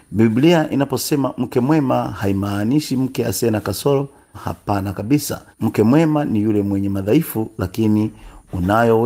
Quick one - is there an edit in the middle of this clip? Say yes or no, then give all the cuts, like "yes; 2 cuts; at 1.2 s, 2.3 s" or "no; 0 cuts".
yes; 2 cuts; at 4.3 s, 5.5 s